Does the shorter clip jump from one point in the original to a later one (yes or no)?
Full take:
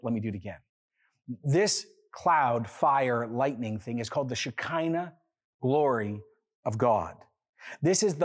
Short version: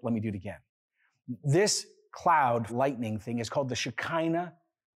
yes